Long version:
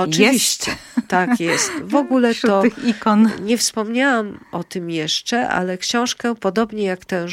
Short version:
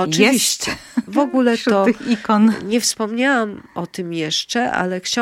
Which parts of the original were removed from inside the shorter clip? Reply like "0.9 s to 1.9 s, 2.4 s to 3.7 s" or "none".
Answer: 1.1 s to 1.8 s